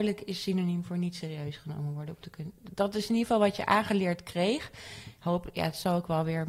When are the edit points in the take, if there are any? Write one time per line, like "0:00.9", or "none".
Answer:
none